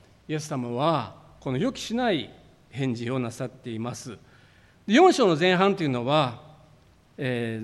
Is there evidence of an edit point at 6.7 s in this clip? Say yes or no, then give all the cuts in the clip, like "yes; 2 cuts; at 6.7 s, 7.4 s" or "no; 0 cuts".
no; 1 cut; at 4.7 s